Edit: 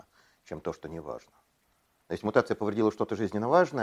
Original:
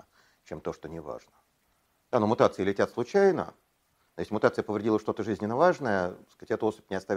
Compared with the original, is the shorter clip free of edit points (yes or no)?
no